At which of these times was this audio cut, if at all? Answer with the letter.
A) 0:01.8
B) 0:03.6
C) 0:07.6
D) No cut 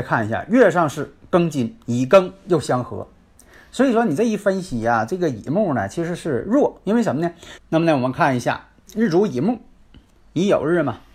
C